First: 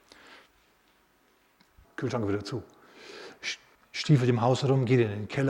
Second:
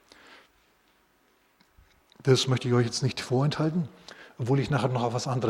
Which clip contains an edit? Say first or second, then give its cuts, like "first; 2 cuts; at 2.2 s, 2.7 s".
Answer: first; 2 cuts; at 1.8 s, 3.8 s